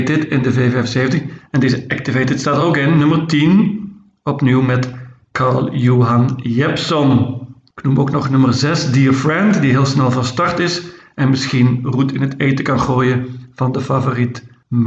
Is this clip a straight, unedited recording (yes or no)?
yes